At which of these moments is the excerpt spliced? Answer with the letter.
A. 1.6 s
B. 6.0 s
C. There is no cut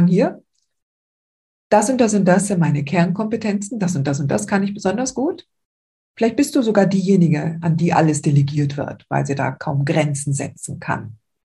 B